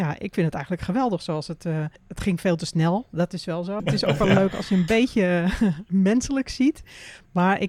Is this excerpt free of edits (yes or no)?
no